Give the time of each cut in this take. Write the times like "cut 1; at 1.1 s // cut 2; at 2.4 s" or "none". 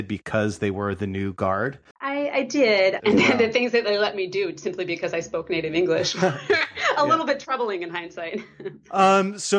cut 1; at 1.9 s // cut 2; at 3.0 s